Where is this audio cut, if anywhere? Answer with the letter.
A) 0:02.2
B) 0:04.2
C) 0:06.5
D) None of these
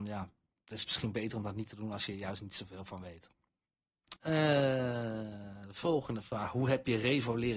B